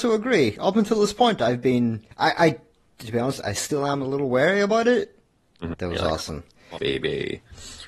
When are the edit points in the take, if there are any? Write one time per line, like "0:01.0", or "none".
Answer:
0:02.1
0:05.7
0:06.8